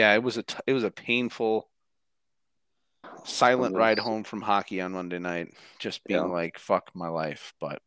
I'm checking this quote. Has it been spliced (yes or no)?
yes